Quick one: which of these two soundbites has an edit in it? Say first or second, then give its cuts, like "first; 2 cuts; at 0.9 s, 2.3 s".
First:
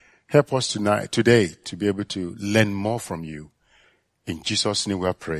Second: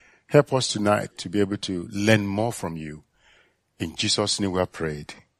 second; 1 cut; at 1.1 s